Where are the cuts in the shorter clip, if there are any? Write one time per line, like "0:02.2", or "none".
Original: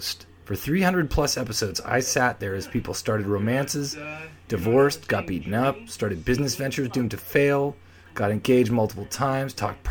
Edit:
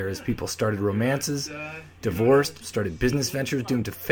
0:02.6